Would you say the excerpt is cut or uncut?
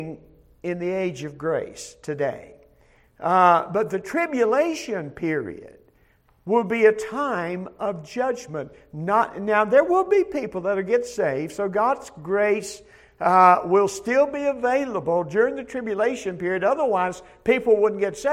uncut